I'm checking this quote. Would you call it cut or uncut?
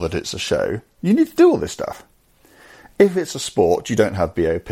cut